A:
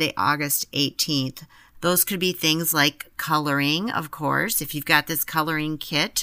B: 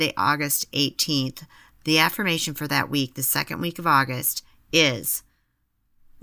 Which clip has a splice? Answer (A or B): A